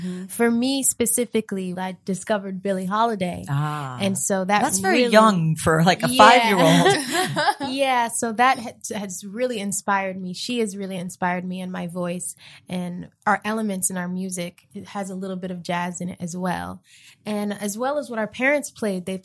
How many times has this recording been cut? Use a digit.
1